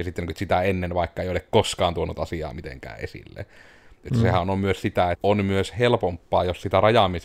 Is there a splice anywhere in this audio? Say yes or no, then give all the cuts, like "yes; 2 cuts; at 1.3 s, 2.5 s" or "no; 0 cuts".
yes; 1 cut; at 5.1 s